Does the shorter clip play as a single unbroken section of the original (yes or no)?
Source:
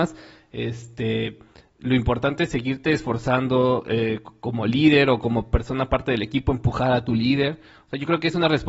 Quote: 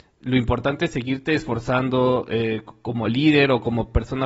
yes